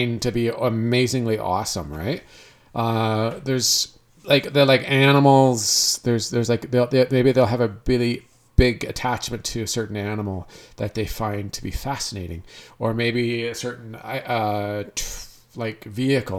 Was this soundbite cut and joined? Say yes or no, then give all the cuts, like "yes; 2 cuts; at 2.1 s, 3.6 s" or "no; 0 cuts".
no; 0 cuts